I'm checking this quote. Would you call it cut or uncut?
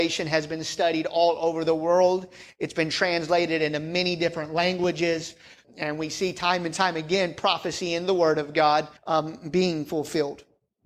cut